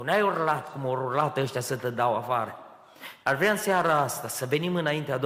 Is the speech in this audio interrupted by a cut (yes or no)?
yes